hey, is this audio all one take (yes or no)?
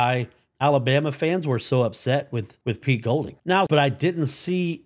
no